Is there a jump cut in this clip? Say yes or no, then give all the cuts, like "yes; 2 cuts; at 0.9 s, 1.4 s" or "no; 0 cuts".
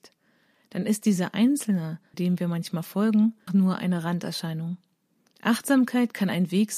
yes; 3 cuts; at 2.1 s, 3.5 s, 5.3 s